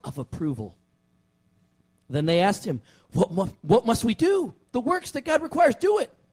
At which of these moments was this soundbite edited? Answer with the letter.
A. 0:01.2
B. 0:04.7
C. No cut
B